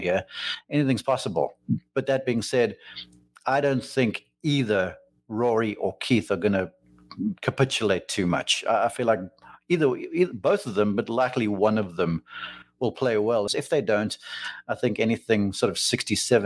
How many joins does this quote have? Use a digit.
1